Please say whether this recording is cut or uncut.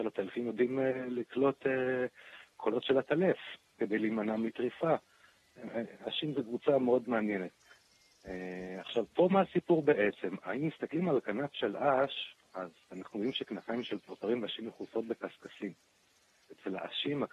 uncut